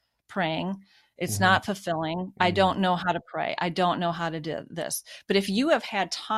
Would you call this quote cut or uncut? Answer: cut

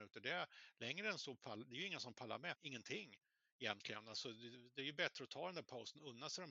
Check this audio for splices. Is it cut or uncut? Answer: cut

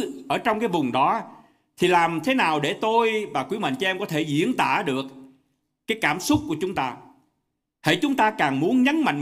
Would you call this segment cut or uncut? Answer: uncut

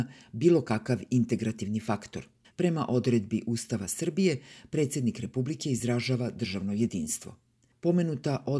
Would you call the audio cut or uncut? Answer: cut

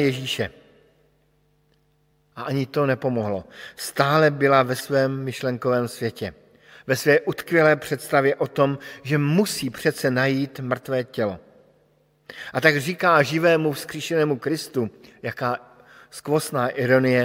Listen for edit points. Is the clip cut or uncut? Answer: uncut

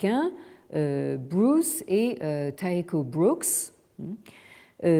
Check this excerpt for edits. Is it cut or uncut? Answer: uncut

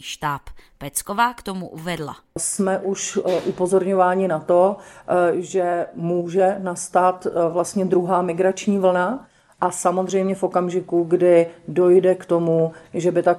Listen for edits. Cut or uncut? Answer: uncut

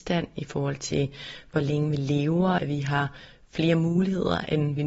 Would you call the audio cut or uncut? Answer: cut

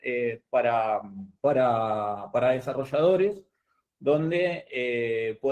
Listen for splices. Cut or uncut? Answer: cut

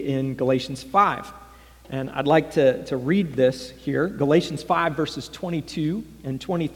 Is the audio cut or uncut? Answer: uncut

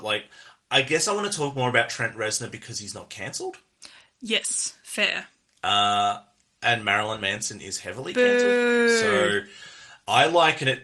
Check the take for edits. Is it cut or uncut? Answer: uncut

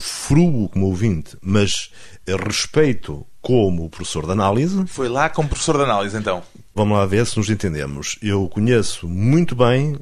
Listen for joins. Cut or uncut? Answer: cut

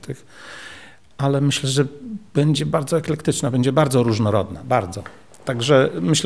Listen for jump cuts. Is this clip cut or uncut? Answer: uncut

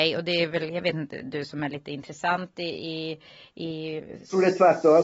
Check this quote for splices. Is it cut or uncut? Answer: uncut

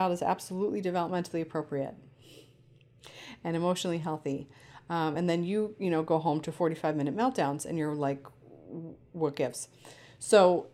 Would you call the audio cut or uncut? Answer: uncut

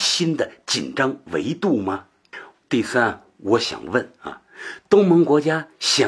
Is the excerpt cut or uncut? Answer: cut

